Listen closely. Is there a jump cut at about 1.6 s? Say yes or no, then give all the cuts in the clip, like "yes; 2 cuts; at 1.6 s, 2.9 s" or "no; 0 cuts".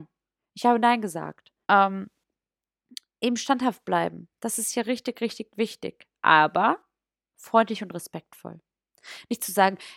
yes; 1 cut; at 1.6 s